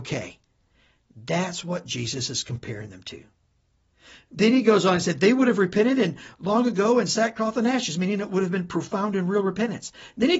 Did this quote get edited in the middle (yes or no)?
no